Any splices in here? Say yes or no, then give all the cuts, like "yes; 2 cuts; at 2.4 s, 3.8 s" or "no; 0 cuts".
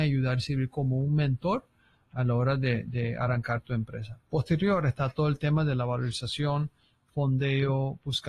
no; 0 cuts